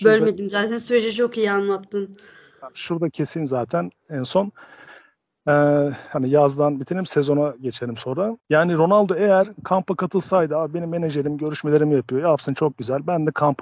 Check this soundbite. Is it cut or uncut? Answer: cut